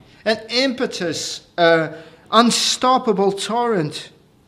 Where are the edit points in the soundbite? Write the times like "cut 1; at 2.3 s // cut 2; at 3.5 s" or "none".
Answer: none